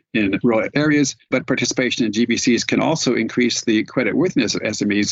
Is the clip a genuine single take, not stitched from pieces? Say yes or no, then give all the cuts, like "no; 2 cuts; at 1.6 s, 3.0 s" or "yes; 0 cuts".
yes; 0 cuts